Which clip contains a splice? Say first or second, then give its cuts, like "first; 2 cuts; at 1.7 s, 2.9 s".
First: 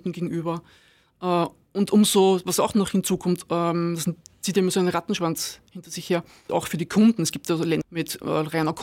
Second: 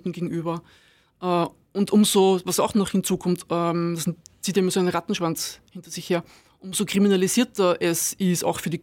first; 2 cuts; at 6.5 s, 7.8 s